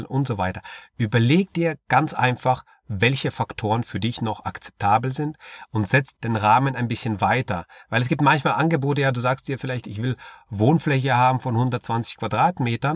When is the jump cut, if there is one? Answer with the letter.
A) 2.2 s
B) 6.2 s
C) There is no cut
B